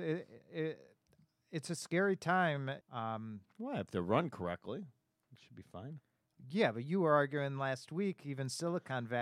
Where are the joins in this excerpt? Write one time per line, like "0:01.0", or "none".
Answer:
0:02.8